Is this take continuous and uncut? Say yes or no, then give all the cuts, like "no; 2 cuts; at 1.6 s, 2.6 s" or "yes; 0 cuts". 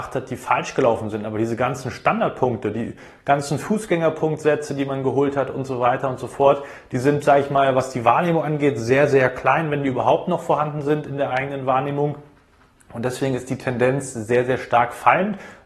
yes; 0 cuts